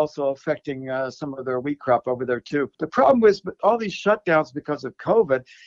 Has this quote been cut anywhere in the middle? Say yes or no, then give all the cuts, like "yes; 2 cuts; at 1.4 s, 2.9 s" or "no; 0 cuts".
no; 0 cuts